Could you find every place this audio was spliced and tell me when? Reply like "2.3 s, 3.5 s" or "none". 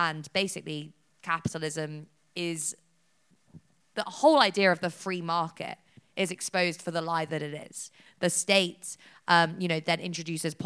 8.1 s